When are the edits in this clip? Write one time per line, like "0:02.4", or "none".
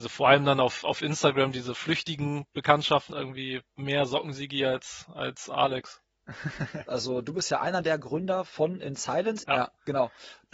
0:03.1
0:06.9
0:09.4